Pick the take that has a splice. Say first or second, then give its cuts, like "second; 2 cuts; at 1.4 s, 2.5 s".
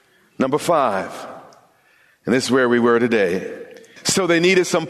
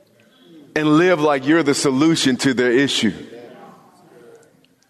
first; 1 cut; at 4.0 s